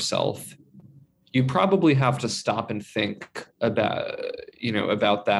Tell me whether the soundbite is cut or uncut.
uncut